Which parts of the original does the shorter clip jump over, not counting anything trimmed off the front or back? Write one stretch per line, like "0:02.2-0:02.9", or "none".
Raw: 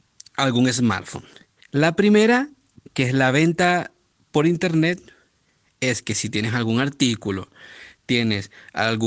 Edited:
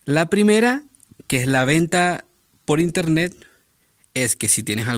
none